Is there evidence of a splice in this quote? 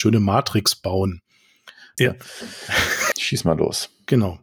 yes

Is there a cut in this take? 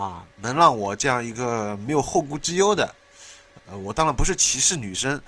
yes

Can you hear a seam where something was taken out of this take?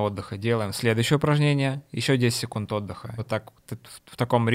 yes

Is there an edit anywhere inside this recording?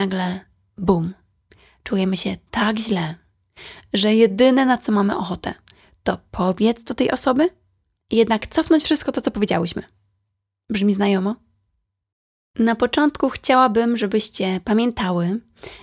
no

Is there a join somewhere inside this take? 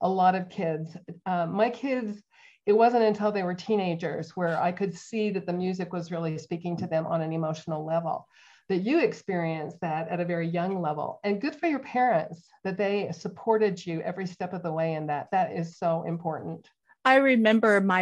no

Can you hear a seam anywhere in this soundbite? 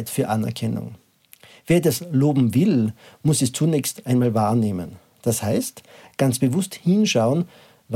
no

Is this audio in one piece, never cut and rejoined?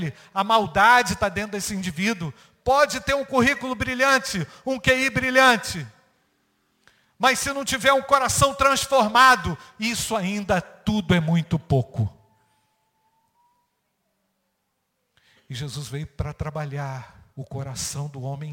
no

